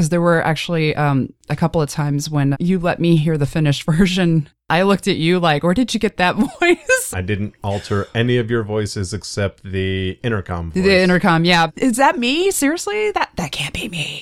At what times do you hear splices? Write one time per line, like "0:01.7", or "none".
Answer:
0:02.5
0:07.1
0:11.7